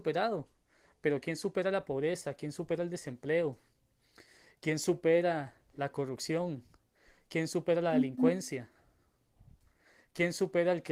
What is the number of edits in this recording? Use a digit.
0